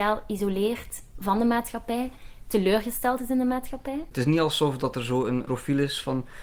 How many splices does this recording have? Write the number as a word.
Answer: one